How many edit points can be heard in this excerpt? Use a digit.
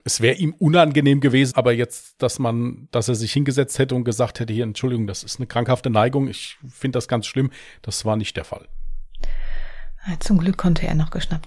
1